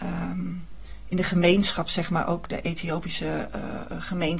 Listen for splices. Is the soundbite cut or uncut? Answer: uncut